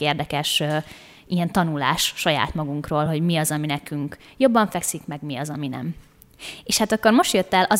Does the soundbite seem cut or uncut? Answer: uncut